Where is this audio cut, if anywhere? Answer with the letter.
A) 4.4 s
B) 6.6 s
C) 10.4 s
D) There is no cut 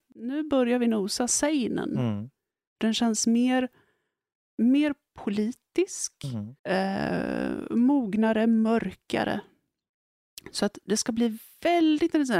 B